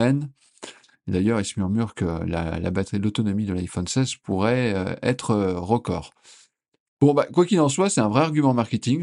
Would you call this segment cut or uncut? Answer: uncut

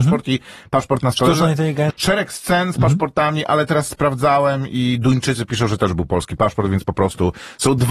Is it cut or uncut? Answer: cut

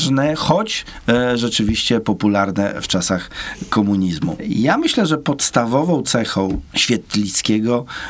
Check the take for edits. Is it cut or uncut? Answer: uncut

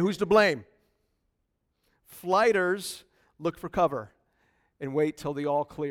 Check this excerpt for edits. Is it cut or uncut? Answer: uncut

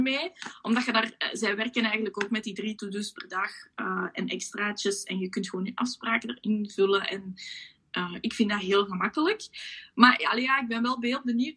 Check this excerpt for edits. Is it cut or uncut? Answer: uncut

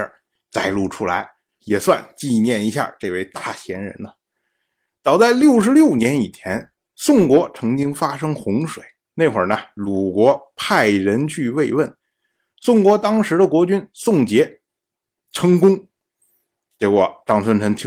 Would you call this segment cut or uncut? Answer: cut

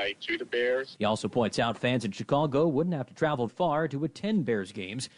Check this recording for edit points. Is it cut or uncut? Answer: cut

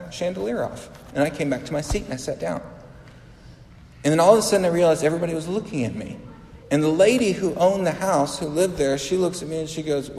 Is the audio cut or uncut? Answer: cut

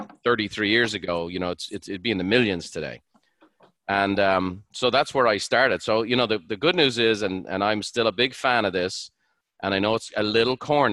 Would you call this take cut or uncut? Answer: uncut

